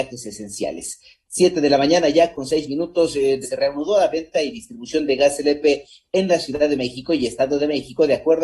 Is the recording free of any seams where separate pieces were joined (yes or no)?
no